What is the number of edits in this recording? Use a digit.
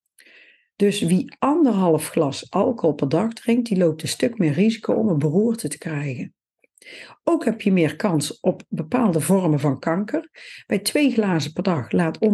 0